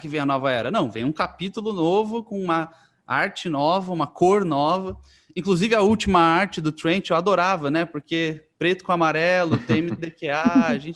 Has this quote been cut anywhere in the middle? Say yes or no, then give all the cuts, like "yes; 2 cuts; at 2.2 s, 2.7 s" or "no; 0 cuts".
no; 0 cuts